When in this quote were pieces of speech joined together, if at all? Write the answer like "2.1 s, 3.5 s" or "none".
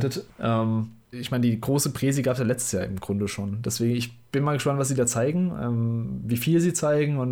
none